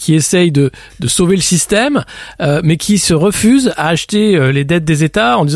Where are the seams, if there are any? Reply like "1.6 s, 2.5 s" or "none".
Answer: none